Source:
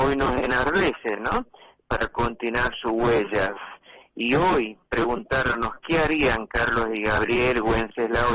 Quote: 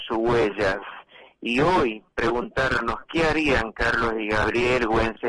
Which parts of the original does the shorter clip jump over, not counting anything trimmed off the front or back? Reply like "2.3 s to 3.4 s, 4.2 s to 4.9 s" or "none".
none